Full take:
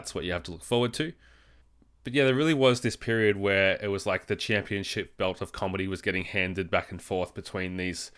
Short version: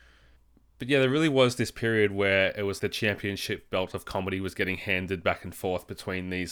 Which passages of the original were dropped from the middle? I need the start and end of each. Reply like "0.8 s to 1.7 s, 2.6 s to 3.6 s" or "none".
4.0 s to 4.3 s